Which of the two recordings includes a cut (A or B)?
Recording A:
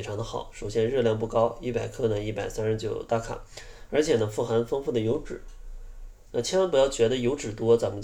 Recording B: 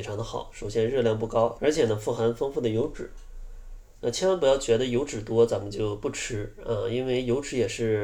B